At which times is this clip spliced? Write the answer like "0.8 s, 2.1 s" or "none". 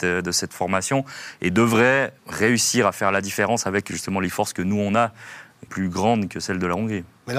2.2 s, 5.7 s